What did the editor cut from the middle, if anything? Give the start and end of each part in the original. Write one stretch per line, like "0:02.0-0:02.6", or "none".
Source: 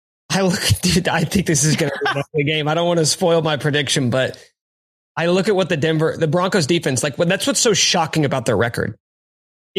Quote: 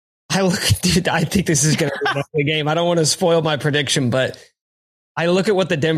none